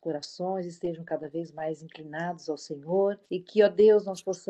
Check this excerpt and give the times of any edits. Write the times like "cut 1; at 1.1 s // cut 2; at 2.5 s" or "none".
cut 1; at 3.3 s